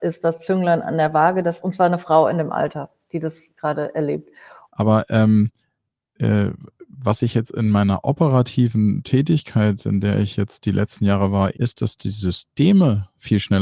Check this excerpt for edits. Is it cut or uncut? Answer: cut